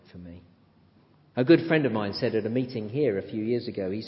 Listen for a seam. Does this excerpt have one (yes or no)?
yes